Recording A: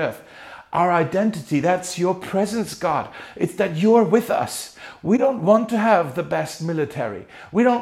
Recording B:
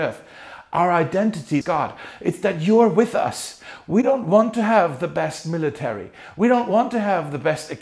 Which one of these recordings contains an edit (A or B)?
B